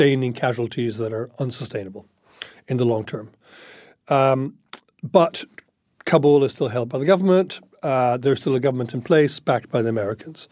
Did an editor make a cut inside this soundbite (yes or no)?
no